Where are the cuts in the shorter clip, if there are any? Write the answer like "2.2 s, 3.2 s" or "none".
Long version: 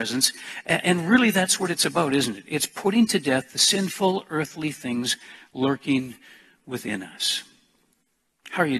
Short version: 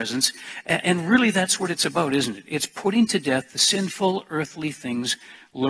none